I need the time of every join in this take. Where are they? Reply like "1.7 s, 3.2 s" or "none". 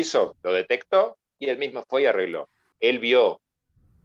2.7 s